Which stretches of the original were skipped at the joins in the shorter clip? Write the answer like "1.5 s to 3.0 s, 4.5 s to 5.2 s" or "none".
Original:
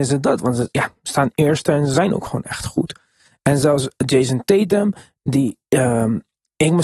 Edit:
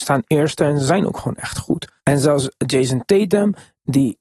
3.1 s to 3.4 s